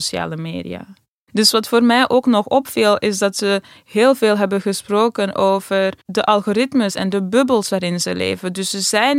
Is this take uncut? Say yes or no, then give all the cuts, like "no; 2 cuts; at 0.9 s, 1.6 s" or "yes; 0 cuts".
no; 1 cut; at 6.0 s